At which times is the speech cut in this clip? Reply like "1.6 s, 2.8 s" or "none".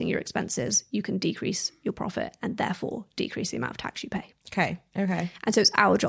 4.9 s